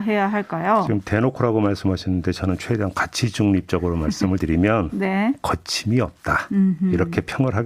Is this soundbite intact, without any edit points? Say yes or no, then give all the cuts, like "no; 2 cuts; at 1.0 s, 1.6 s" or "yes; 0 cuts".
yes; 0 cuts